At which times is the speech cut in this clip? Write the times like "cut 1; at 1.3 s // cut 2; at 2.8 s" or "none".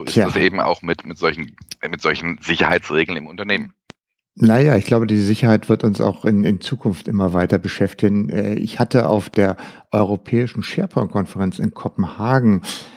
none